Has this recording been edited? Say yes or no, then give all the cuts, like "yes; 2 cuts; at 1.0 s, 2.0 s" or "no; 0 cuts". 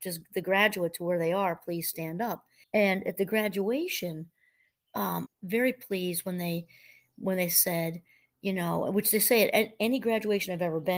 yes; 2 cuts; at 2.6 s, 5.3 s